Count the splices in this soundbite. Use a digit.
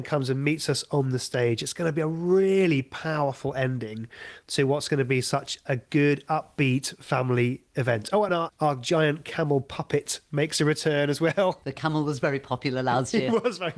0